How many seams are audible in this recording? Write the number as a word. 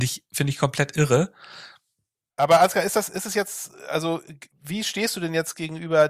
two